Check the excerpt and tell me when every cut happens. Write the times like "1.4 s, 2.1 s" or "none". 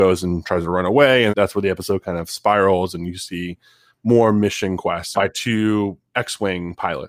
1.3 s, 5.1 s